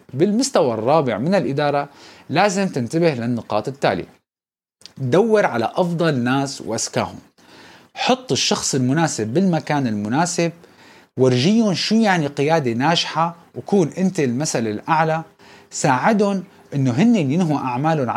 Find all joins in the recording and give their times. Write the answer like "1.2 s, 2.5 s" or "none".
none